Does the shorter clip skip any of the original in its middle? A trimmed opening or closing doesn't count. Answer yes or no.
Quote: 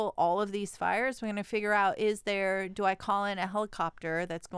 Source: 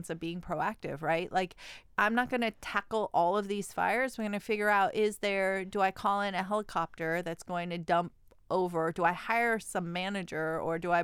no